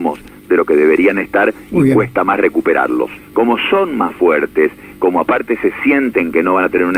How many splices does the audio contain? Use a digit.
1